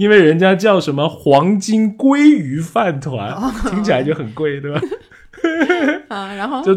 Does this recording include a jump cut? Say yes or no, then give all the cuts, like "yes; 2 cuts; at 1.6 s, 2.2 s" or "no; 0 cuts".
yes; 1 cut; at 4.8 s